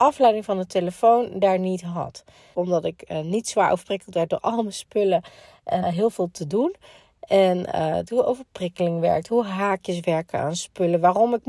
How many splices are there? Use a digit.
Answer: 3